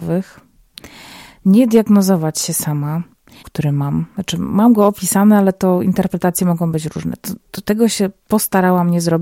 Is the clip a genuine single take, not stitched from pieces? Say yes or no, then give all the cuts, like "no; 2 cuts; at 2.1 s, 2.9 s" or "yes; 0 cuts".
no; 1 cut; at 3.4 s